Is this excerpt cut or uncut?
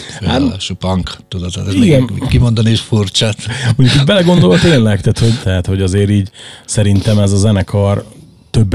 cut